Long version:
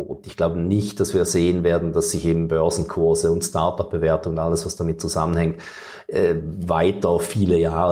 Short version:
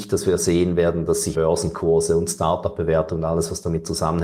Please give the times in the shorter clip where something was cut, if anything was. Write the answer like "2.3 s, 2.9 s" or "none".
1.3 s